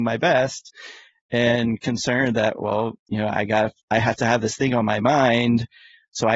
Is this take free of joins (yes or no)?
yes